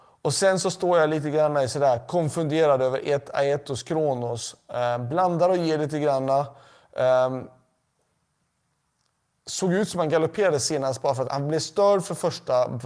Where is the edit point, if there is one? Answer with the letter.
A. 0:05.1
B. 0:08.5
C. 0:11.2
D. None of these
C